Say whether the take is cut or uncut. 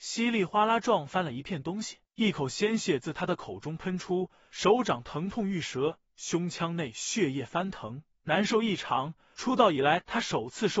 uncut